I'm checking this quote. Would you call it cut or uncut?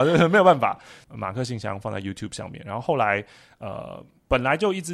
cut